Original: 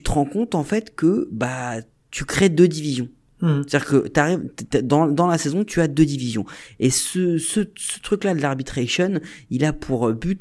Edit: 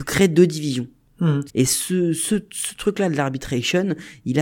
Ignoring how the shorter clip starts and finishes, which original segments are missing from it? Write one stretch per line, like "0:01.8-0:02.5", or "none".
0:03.7-0:06.7